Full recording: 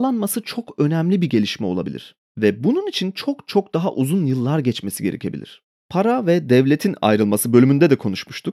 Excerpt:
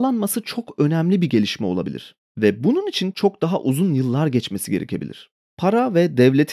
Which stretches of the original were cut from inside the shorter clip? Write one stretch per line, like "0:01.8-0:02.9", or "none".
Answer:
0:03.1-0:03.5